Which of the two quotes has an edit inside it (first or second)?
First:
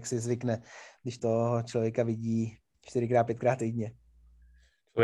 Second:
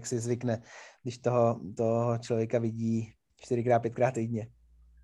first